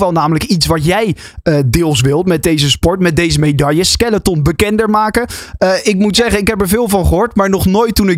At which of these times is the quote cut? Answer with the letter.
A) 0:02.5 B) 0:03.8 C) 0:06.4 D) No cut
D